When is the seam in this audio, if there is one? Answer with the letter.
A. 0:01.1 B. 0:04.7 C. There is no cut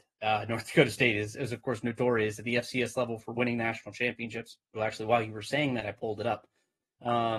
B